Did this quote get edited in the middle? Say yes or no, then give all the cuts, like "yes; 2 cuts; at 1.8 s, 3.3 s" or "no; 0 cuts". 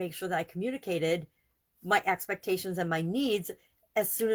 no; 0 cuts